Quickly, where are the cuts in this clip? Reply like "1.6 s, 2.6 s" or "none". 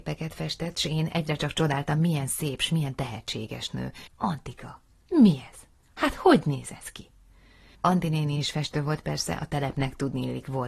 4.1 s, 7.7 s